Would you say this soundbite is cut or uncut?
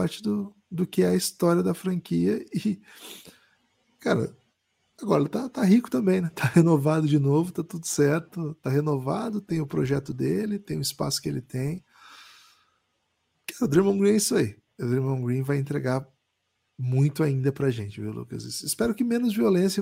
uncut